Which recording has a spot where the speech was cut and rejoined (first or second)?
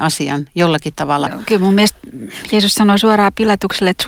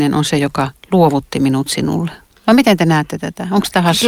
first